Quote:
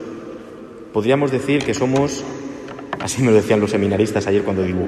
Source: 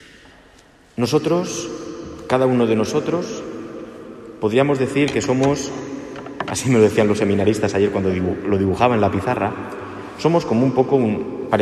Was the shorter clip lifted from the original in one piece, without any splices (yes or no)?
yes